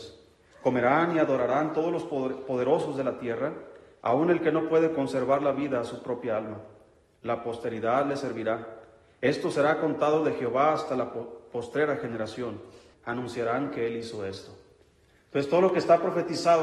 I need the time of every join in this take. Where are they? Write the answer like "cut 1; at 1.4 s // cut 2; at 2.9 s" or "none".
cut 1; at 4.0 s // cut 2; at 12.9 s

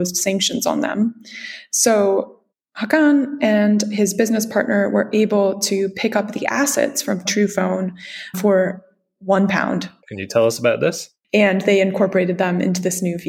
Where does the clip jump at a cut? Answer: cut 1; at 10.0 s // cut 2; at 11.2 s

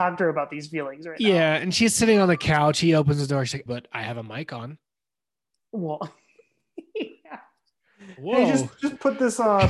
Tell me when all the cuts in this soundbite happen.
cut 1; at 3.7 s

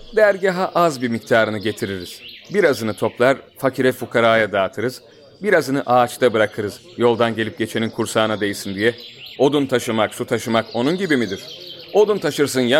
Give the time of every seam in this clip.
cut 1; at 9.4 s

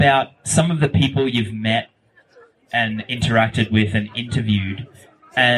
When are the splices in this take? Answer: none

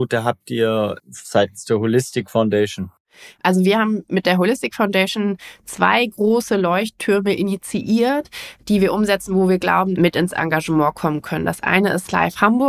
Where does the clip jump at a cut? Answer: cut 1; at 9.9 s

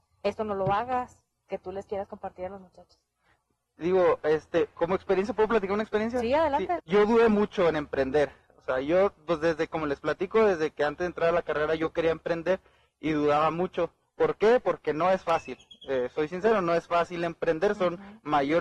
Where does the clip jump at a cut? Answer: cut 1; at 6.8 s

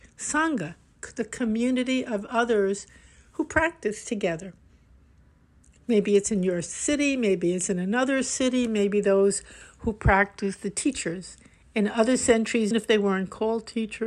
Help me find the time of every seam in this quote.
cut 1; at 8.7 s // cut 2; at 12.7 s

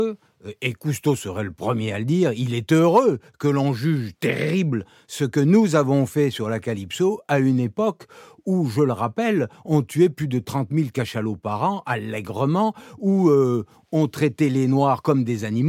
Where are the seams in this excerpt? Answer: none

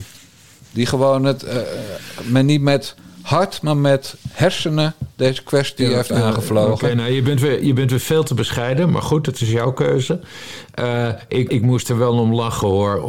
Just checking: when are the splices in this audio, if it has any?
cut 1; at 11.5 s

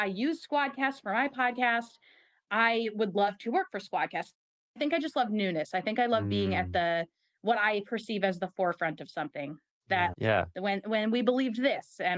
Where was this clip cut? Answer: cut 1; at 4.6 s // cut 2; at 10.1 s

